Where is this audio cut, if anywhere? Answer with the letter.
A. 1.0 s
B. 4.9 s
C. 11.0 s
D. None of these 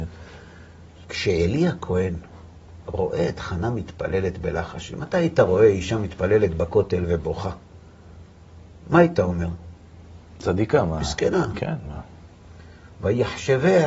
A